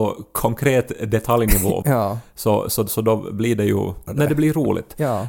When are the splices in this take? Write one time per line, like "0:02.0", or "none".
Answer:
0:01.8
0:04.1